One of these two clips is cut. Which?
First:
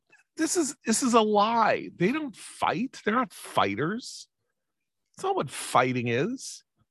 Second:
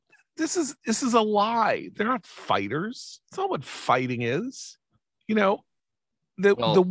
second; 2 cuts; at 1.9 s, 3.2 s

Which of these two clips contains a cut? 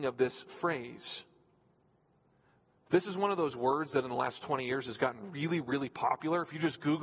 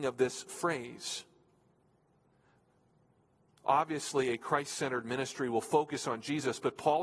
first; 1 cut; at 2.8 s

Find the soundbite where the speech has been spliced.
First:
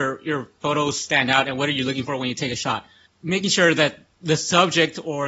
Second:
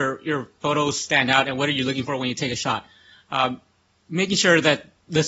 first; 1 cut; at 3.1 s

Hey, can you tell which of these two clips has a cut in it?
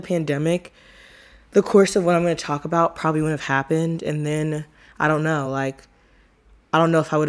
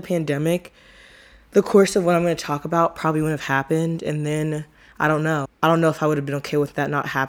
second; 1 cut; at 5.5 s

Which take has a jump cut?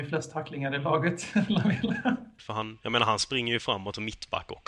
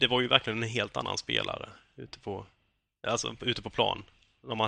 first; 1 cut; at 2.4 s

